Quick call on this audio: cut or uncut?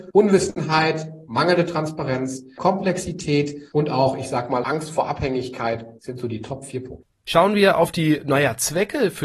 uncut